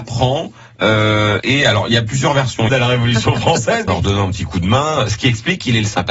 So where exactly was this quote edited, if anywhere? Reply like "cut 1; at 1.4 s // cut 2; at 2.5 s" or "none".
cut 1; at 1.4 s // cut 2; at 2.7 s // cut 3; at 3.9 s